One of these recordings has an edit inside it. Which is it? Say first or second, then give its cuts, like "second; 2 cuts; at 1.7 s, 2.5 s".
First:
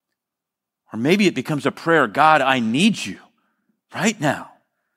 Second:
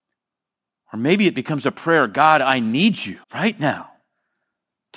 second; 1 cut; at 3.2 s